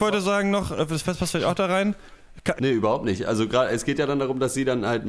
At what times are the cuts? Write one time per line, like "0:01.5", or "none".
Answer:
0:02.6